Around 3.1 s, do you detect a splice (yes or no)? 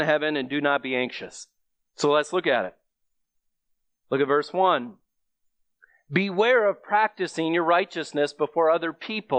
no